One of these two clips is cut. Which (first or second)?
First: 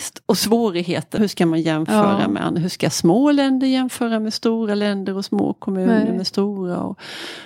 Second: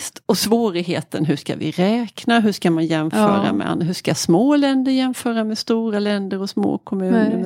first